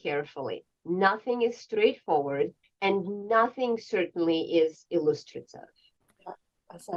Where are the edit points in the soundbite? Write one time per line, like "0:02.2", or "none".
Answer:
0:02.6

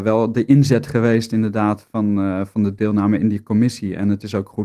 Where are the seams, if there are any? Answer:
none

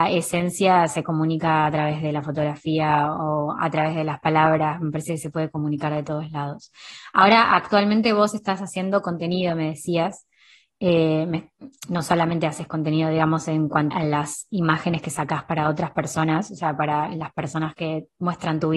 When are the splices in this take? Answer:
0:13.9

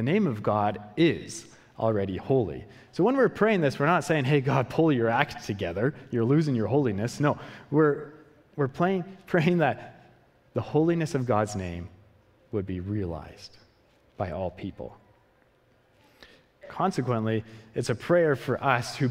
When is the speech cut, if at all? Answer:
0:16.5

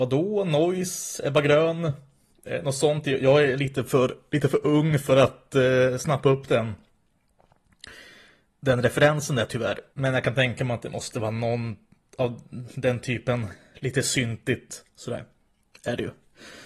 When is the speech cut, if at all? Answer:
0:09.9

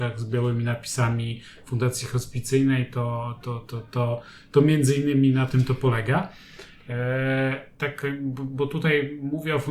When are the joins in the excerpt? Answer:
0:07.8

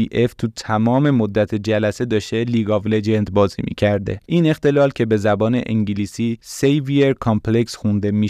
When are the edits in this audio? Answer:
0:04.3

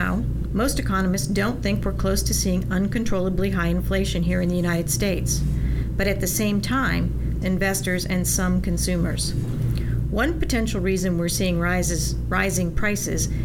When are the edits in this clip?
0:07.4

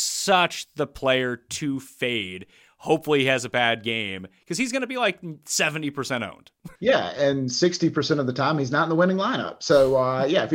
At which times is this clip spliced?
0:06.7

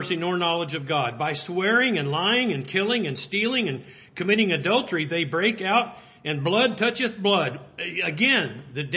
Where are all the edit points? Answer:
none

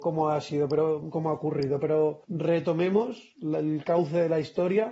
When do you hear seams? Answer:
0:02.2

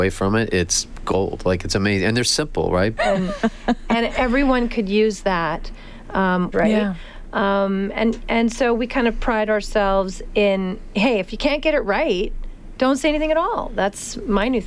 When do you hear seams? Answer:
0:03.0
0:06.5

